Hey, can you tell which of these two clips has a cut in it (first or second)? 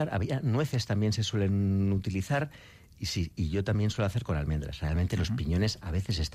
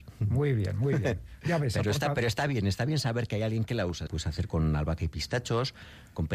second